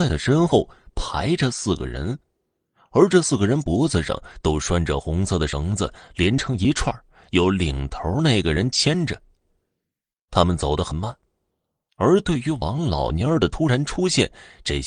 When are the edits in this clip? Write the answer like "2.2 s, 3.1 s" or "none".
none